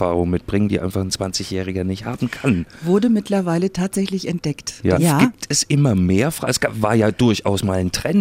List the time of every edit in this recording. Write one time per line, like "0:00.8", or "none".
0:05.0